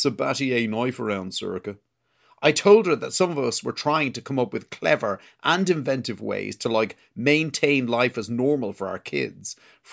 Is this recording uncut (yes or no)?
yes